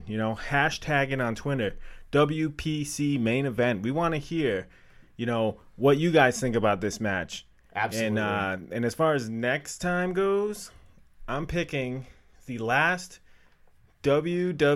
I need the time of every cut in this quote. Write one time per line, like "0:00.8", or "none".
none